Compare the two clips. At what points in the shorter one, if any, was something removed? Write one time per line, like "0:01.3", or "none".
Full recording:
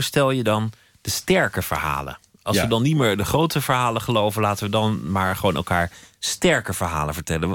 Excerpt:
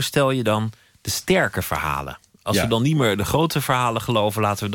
none

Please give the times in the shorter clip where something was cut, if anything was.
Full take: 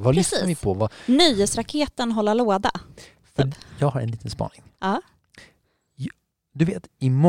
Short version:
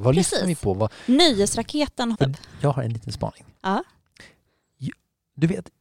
0:02.1

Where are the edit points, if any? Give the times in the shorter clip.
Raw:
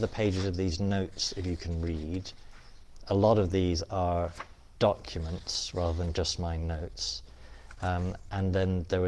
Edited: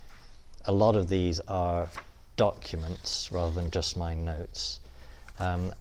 none

